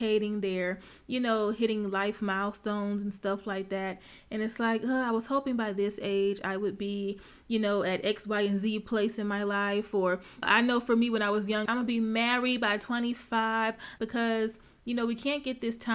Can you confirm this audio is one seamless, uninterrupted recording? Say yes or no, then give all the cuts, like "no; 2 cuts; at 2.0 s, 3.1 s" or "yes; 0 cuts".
no; 3 cuts; at 10.4 s, 11.7 s, 14.0 s